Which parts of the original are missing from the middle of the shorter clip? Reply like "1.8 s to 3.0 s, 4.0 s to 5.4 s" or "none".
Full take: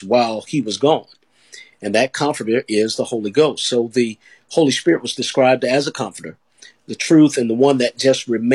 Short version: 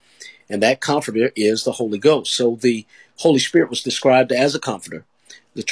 none